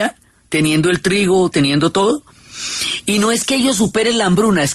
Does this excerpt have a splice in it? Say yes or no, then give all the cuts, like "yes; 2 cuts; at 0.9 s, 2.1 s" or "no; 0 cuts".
yes; 1 cut; at 1.5 s